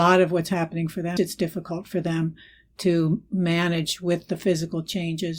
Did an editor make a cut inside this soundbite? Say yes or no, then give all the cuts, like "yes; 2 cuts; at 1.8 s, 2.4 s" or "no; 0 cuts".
yes; 1 cut; at 1.2 s